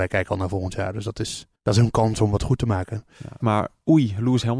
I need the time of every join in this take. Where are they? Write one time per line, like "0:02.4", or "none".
0:01.6
0:03.4

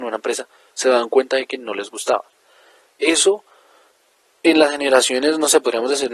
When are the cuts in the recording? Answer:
0:02.9

